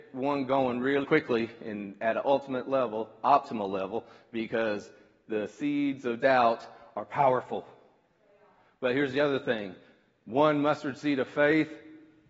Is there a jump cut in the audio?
yes; 1 cut; at 1.0 s

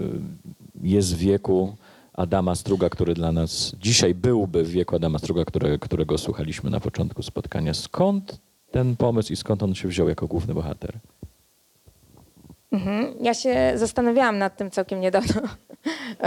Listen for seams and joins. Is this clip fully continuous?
yes; 0 cuts

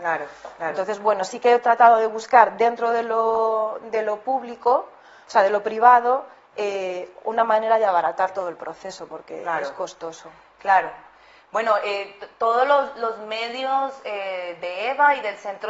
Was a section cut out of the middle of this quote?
no; 0 cuts

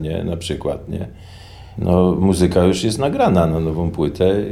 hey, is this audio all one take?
no; 1 cut; at 1.8 s

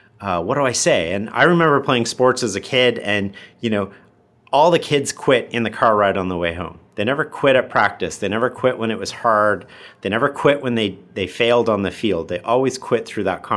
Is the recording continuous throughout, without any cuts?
yes; 0 cuts

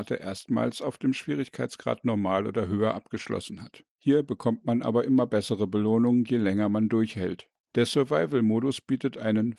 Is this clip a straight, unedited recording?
no; 1 cut; at 4.0 s

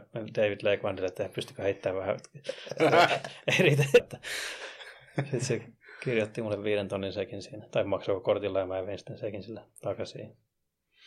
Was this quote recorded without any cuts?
no; 2 cuts; at 4.0 s, 9.8 s

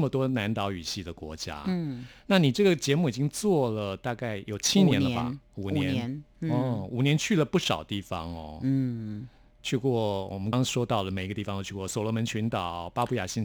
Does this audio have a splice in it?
yes; 1 cut; at 10.5 s

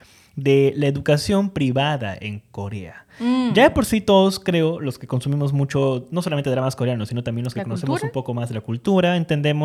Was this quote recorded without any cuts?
yes; 0 cuts

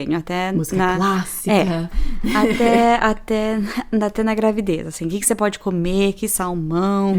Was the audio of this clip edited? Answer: no; 0 cuts

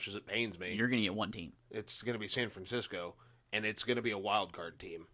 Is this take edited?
no; 0 cuts

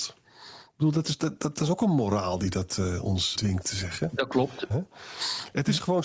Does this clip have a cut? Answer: yes; 2 cuts; at 3.3 s, 4.7 s

